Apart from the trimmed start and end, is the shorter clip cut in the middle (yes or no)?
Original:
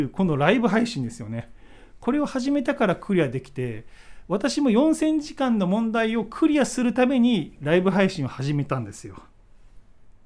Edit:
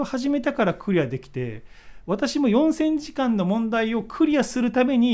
no